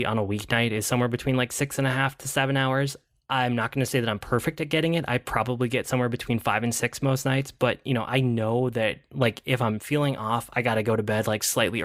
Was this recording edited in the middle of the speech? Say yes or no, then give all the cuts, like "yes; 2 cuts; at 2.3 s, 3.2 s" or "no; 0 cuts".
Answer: no; 0 cuts